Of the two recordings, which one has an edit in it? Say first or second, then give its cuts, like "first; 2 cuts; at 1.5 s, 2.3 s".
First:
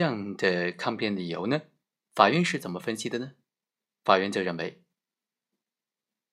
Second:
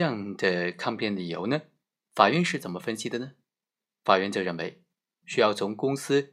second; 1 cut; at 5.2 s